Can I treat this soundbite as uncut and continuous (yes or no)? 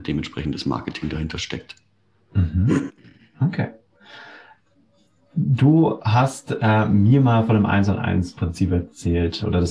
yes